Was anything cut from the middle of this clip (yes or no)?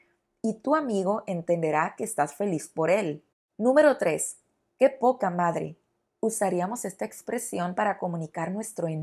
no